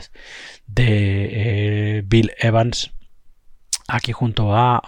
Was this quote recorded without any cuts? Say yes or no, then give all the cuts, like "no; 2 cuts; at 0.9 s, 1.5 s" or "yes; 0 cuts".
yes; 0 cuts